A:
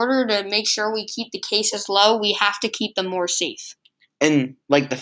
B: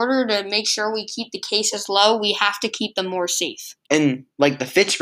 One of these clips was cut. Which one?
B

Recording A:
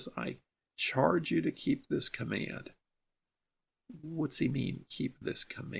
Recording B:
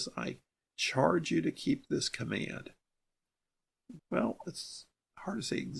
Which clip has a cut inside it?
B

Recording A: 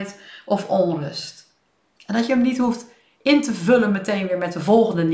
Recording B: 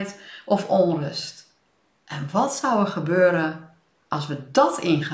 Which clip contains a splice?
A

